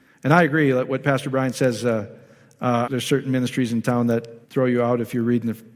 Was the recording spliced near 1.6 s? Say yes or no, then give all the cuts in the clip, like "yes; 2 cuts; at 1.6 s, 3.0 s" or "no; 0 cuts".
no; 2 cuts; at 2.9 s, 4.4 s